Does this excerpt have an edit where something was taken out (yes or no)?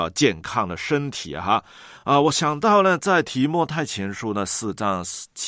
no